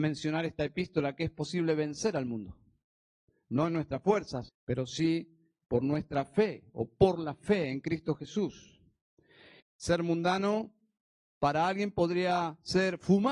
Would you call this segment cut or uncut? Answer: cut